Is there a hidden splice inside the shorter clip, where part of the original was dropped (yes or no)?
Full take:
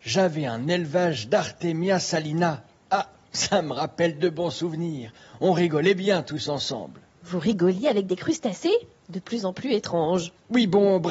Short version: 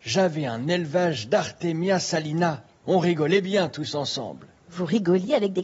yes